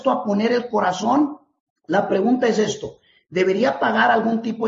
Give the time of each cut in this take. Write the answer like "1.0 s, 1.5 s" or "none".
none